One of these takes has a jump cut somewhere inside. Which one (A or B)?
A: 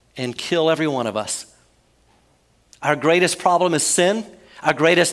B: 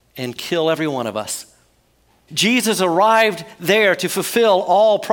B